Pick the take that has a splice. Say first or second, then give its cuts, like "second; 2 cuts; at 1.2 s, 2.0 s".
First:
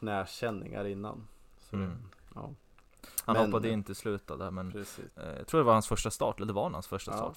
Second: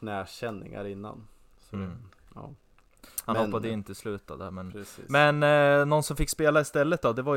first; 1 cut; at 5.1 s